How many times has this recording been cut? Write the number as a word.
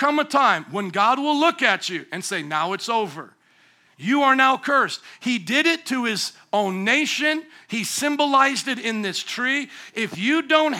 one